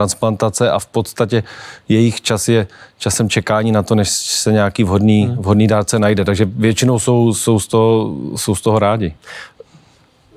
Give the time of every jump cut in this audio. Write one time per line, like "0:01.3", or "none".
none